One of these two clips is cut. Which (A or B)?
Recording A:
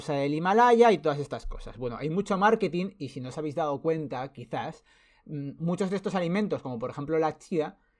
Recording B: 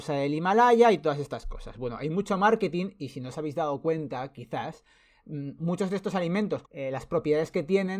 B